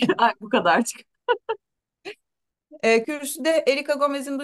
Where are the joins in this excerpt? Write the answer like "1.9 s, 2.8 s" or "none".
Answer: 3.0 s